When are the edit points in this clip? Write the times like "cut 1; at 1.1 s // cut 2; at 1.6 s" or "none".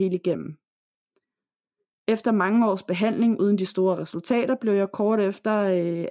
none